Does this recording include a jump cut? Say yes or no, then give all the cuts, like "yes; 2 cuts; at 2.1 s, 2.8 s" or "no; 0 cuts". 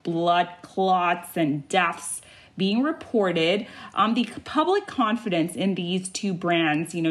no; 0 cuts